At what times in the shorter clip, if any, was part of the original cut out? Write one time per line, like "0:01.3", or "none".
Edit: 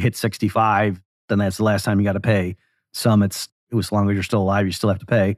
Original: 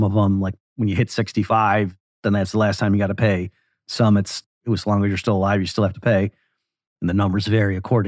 none